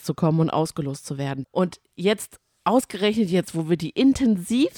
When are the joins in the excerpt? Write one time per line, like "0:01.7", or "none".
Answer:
0:01.4